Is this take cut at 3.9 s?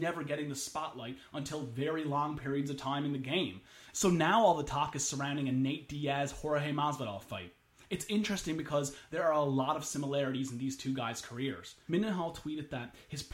yes; 2 cuts; at 3.9 s, 11.9 s

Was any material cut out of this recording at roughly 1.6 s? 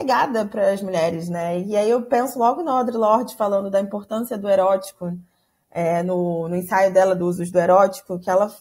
no; 0 cuts

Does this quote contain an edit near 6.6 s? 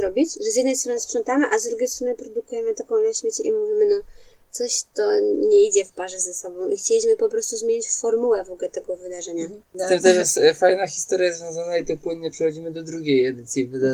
no; 1 cut; at 9.6 s

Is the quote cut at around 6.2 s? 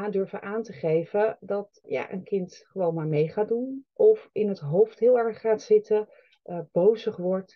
no; 1 cut; at 1.8 s

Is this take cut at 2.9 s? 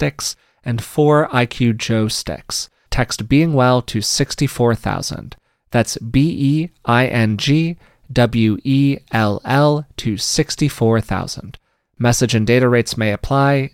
yes; 1 cut; at 2.9 s

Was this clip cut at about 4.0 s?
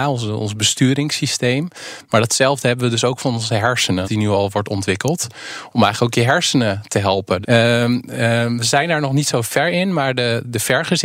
yes; 2 cuts; at 4.0 s, 7.4 s

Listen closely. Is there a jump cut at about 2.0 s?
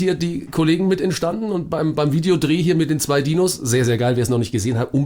no; 0 cuts

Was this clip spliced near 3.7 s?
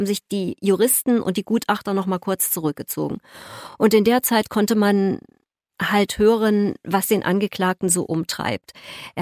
no; 0 cuts

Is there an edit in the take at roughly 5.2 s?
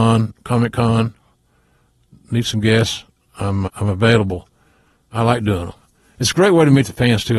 no; 1 cut; at 3.7 s

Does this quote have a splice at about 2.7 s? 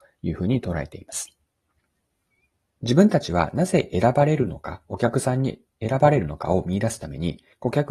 no; 0 cuts

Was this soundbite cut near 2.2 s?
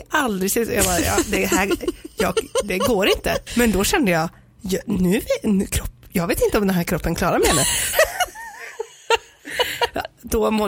no; 2 cuts; at 3.5 s, 7.9 s

